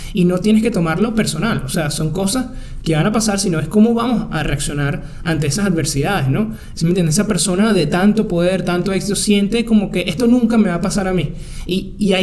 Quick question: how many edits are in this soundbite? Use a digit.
1